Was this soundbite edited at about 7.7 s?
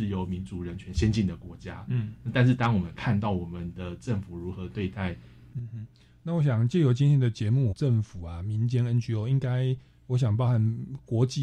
yes; 2 cuts; at 5.5 s, 7.7 s

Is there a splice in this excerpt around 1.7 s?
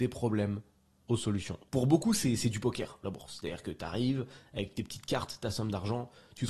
yes; 1 cut; at 1.7 s

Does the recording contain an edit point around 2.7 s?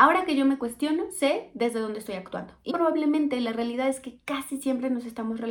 yes; 1 cut; at 2.7 s

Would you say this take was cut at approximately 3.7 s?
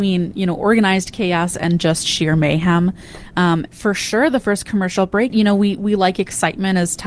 yes; 2 cuts; at 3.7 s, 5.3 s

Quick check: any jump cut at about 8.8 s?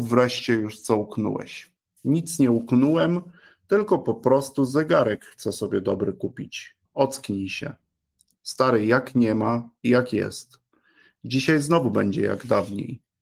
no; 1 cut; at 6.9 s

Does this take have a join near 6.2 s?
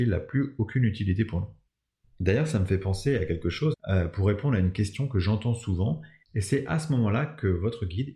yes; 2 cuts; at 3.7 s, 6.2 s

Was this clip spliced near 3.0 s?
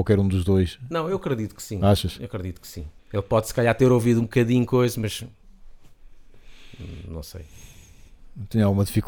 yes; 1 cut; at 3.0 s

